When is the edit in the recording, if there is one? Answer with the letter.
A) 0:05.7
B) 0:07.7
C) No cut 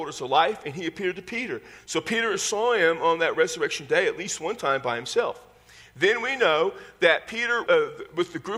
B